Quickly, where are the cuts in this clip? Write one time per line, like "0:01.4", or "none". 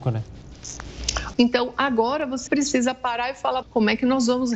0:01.3
0:02.5
0:03.6